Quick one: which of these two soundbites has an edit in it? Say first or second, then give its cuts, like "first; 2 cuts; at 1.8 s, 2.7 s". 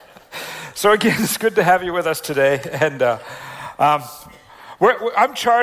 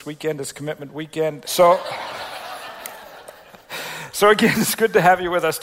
second; 1 cut; at 1.4 s